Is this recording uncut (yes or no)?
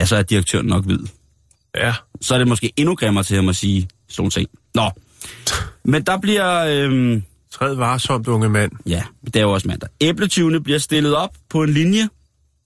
yes